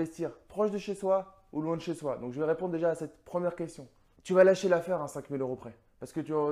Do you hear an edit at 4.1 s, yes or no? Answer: yes